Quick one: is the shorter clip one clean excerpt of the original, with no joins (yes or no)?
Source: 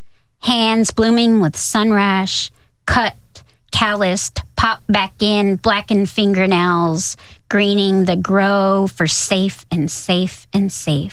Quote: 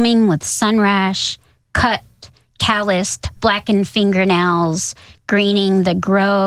no